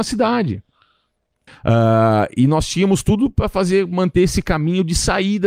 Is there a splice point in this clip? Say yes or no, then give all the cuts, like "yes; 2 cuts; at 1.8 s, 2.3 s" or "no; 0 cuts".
yes; 1 cut; at 1.5 s